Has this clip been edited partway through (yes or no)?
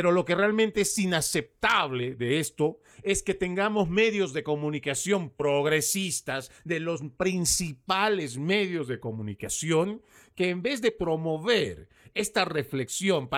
no